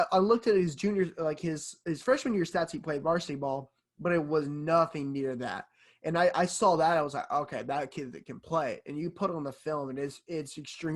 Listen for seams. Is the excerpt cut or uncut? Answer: uncut